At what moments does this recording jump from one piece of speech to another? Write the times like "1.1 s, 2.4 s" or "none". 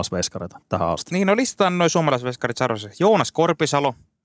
none